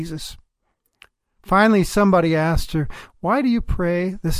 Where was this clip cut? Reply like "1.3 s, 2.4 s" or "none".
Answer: none